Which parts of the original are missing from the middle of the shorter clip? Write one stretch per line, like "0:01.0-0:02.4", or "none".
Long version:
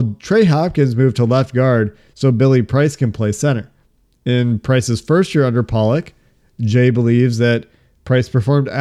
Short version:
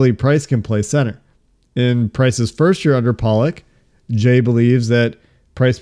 none